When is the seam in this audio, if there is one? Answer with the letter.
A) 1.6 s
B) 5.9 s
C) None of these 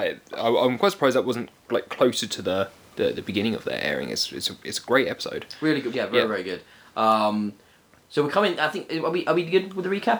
B